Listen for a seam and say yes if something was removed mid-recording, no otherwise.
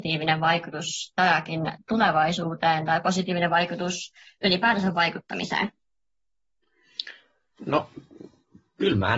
no